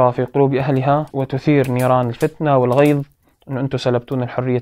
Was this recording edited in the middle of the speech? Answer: no; 0 cuts

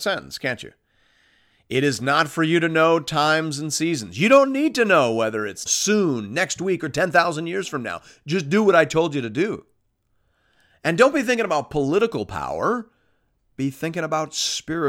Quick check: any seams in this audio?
yes; 1 cut; at 5.7 s

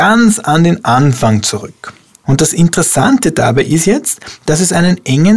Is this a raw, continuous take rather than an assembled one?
no; 1 cut; at 2.2 s

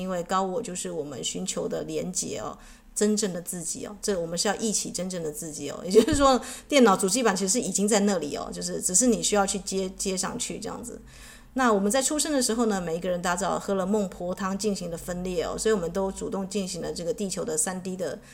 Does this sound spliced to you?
no; 0 cuts

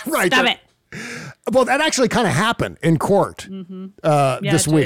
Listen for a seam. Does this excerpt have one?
yes; 1 cut; at 1.6 s

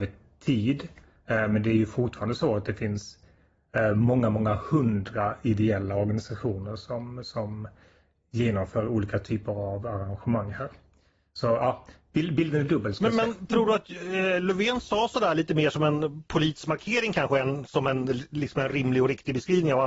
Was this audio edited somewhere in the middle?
no; 0 cuts

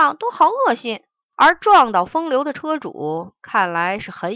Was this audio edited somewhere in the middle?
yes; 1 cut; at 1.3 s

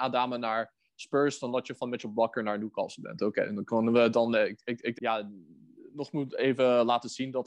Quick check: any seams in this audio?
yes; 1 cut; at 4.9 s

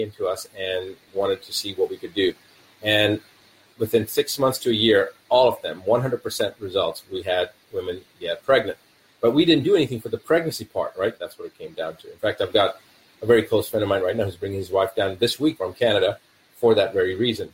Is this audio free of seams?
no; 2 cuts; at 11.2 s, 15.6 s

